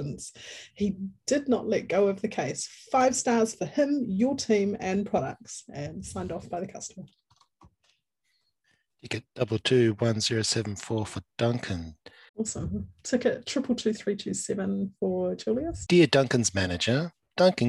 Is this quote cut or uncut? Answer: cut